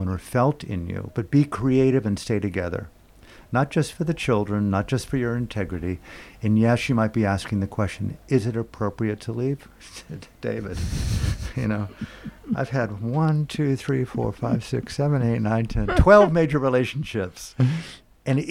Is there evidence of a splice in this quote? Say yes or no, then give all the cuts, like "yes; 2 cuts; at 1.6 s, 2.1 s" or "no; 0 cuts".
no; 0 cuts